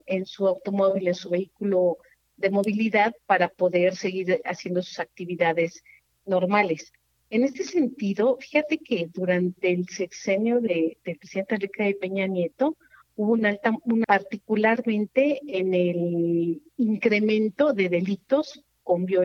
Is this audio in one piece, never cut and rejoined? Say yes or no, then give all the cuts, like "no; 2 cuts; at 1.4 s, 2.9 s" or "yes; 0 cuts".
no; 2 cuts; at 14.0 s, 16.7 s